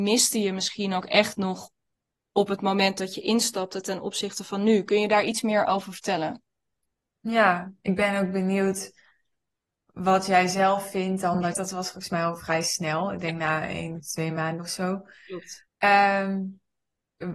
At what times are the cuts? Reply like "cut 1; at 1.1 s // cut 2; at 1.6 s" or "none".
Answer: cut 1; at 11.5 s // cut 2; at 15.7 s